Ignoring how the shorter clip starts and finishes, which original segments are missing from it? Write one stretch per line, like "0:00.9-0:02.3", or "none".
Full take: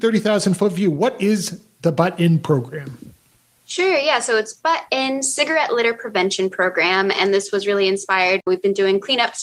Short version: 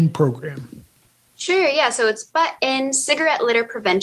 none